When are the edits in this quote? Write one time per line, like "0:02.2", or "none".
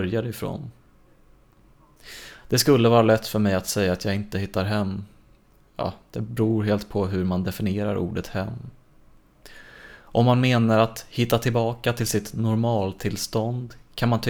none